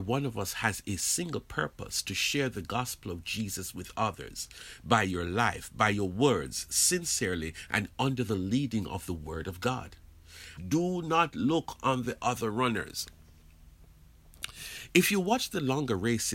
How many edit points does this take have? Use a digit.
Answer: 1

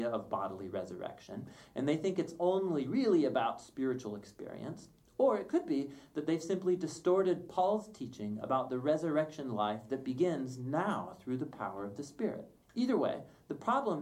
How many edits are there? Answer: 0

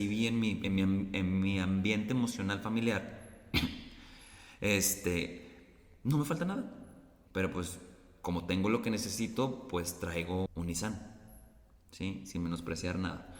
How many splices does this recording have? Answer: 2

